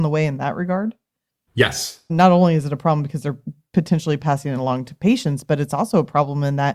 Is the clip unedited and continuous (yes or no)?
no